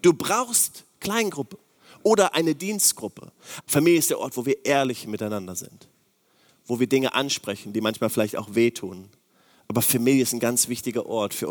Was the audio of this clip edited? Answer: yes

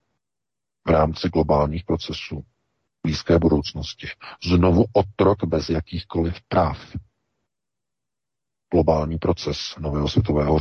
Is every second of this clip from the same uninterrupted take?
yes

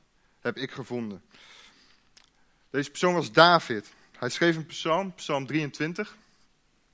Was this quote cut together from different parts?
no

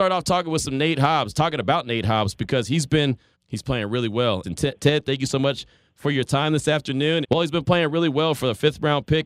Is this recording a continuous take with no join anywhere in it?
no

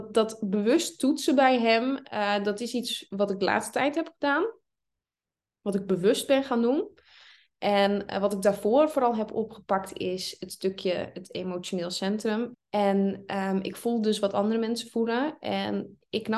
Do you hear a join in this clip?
yes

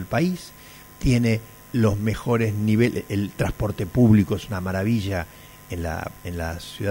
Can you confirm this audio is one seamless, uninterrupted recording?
yes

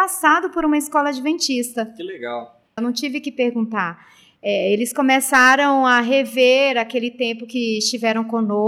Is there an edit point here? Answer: yes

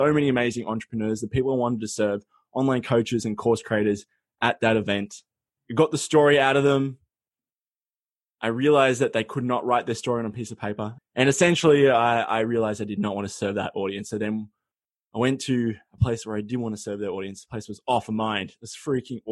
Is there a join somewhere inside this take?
yes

